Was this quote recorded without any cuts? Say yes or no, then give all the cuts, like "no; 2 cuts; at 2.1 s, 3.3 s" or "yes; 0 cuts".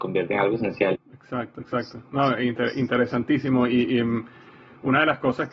no; 1 cut; at 0.9 s